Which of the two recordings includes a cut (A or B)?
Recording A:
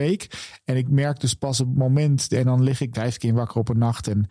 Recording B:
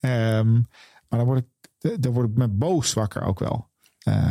A